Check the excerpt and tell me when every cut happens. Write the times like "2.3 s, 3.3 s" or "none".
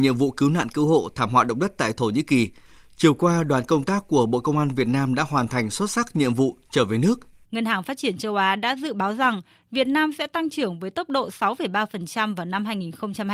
7.4 s